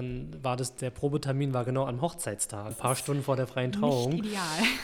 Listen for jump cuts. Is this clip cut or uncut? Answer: cut